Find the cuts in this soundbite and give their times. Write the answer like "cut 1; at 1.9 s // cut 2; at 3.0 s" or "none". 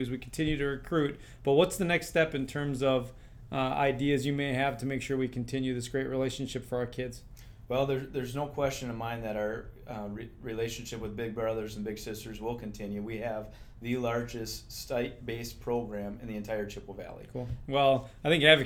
cut 1; at 17.7 s